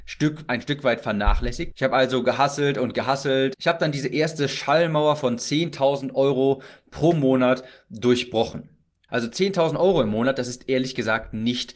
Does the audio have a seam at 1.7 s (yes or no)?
yes